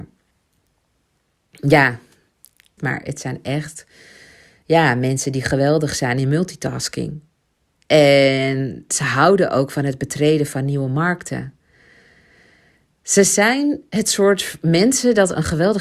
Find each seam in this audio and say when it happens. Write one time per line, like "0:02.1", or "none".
0:02.8